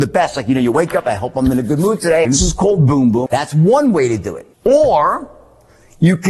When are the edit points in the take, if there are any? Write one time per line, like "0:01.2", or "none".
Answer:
0:02.2
0:03.3
0:04.5